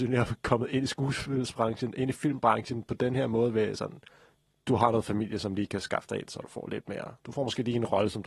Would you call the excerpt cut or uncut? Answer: uncut